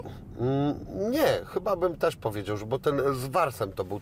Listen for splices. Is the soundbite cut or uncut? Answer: uncut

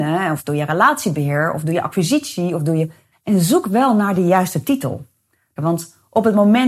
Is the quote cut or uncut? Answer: cut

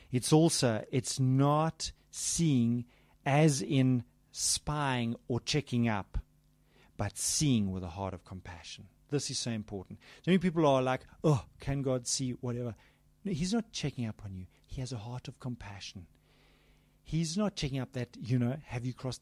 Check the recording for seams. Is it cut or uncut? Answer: uncut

